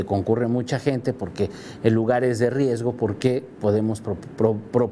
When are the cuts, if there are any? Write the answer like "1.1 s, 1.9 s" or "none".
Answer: none